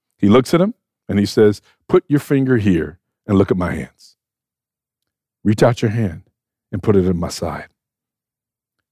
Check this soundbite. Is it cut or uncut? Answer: uncut